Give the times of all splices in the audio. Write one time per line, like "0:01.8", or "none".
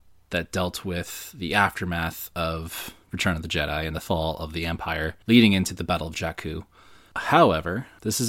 0:05.2
0:07.1